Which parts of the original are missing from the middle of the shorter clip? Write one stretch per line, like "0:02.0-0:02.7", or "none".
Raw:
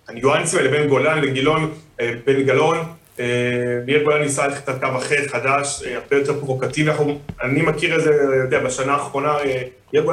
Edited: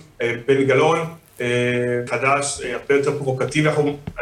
0:03.9-0:05.3

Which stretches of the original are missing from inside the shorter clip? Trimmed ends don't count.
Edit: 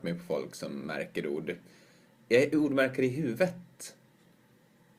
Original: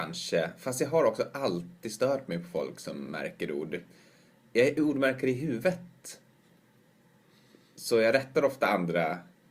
none

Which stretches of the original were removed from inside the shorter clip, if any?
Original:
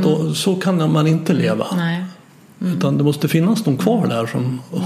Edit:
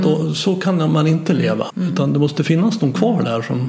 0:01.7-0:02.5

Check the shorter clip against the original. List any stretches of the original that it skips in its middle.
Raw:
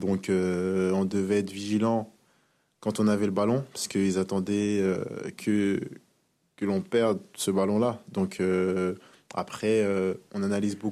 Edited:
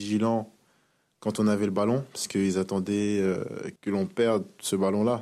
0:05.4-0:06.5

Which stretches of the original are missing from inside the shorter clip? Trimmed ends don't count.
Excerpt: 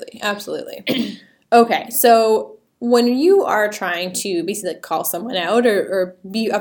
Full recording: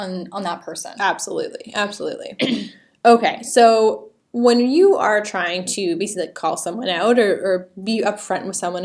none

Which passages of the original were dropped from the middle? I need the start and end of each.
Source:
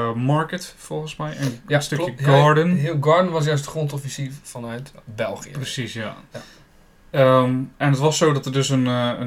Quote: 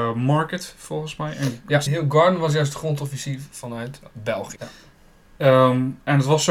0:01.9-0:02.8
0:05.5-0:06.3

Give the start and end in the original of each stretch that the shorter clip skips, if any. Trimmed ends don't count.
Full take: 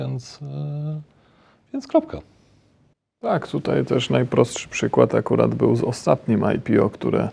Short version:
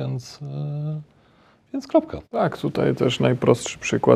0:02.2-0:03.1

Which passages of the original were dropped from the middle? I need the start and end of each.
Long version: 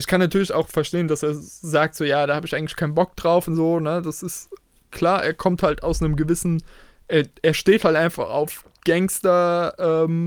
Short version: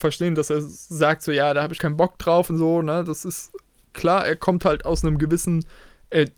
0:02.5-0:02.8

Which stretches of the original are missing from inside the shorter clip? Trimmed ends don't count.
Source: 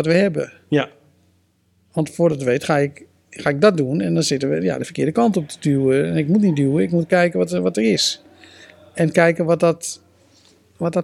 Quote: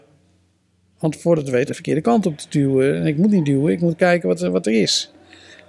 0:02.6-0:04.8

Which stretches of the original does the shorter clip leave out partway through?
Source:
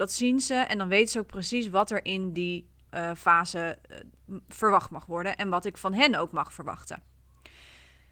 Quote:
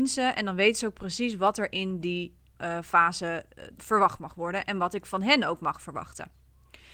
0:04.1-0:04.4

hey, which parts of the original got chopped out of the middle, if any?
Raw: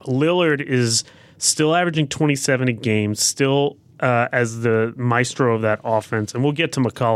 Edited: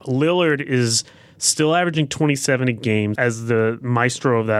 0:03.2-0:04.3

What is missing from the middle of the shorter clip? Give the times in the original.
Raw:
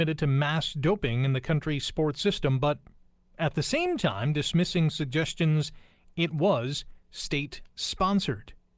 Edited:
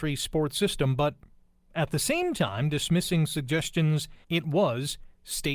0:05.9-0:06.1

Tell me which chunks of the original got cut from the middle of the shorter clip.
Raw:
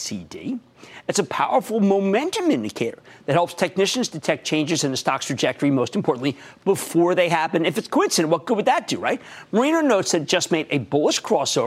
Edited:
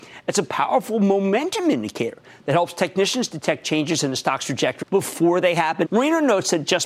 0:05.6-0:06.6
0:07.6-0:09.5

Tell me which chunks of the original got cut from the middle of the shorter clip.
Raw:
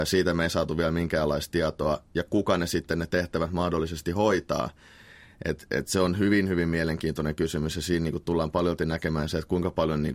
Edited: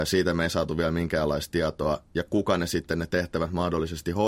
none

